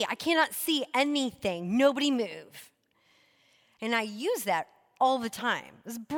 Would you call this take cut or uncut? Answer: cut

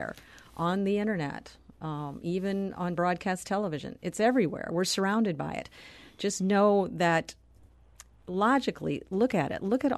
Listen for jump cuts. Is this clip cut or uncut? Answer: uncut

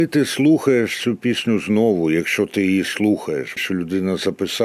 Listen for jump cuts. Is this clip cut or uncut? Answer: cut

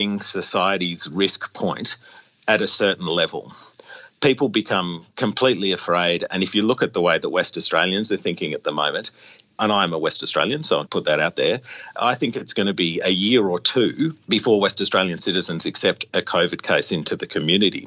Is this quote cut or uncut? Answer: cut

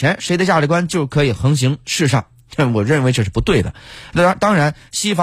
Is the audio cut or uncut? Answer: uncut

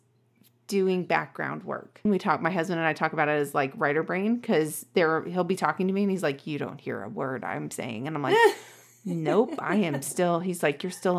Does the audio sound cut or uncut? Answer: cut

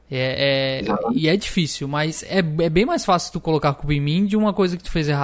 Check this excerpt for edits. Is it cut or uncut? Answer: uncut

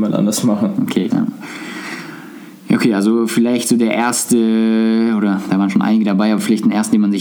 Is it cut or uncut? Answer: cut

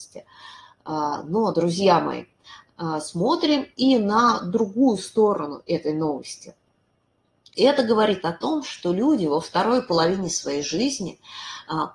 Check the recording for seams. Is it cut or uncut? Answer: uncut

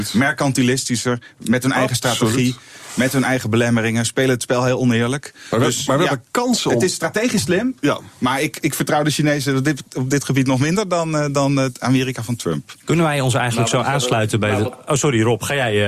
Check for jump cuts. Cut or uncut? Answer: uncut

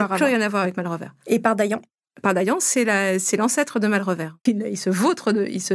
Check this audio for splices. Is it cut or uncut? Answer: cut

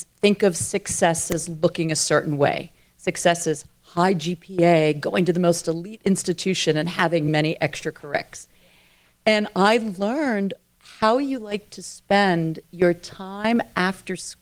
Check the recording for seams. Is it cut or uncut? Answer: uncut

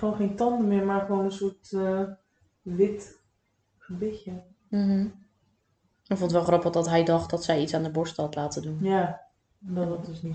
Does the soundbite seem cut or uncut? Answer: uncut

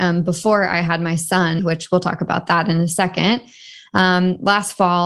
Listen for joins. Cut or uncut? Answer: cut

